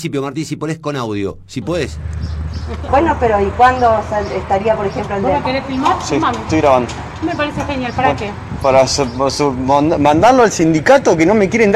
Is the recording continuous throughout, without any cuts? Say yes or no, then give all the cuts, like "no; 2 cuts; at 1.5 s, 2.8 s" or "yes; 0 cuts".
no; 1 cut; at 2.9 s